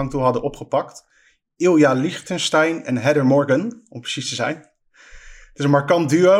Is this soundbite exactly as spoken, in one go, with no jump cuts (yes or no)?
yes